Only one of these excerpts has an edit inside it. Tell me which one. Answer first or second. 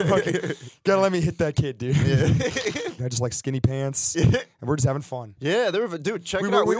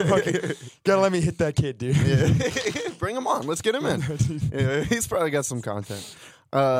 first